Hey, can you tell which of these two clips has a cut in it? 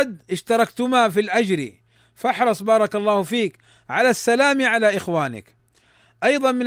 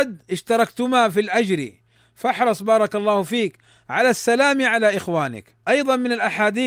second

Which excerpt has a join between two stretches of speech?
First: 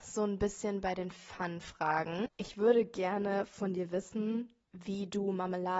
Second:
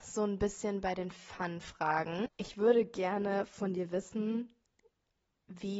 first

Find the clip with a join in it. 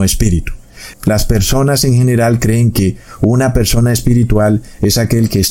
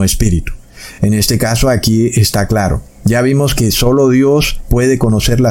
first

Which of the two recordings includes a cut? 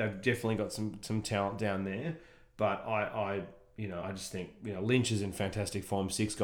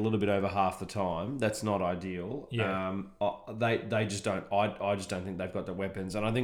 first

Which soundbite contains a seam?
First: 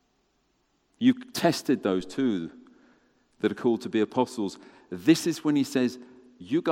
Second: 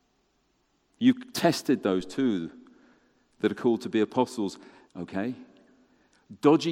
second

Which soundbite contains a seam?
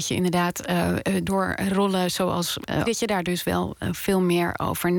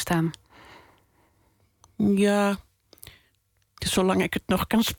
first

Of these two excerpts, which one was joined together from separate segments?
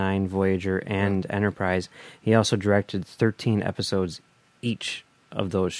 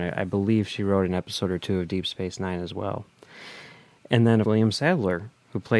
second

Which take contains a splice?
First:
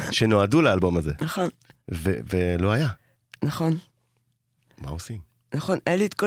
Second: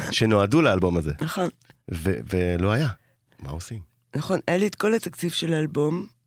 second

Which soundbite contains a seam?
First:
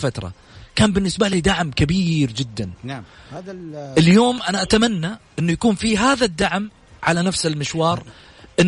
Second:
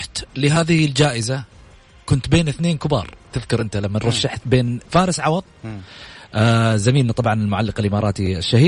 second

